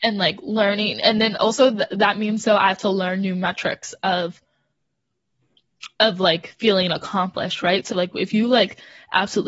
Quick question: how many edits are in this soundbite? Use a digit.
0